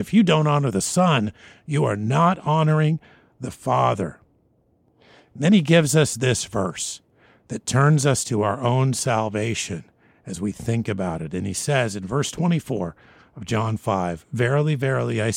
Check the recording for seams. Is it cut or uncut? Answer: uncut